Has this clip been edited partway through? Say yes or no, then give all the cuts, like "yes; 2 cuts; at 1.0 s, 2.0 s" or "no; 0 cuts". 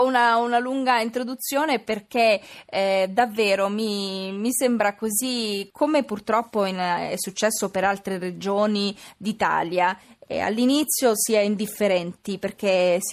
no; 0 cuts